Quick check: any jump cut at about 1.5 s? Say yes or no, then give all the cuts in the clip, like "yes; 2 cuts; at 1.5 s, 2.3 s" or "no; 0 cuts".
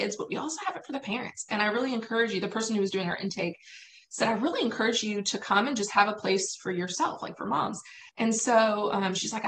no; 1 cut; at 8.1 s